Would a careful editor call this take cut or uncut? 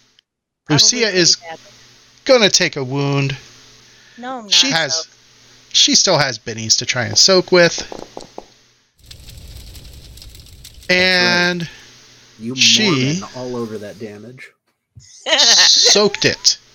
cut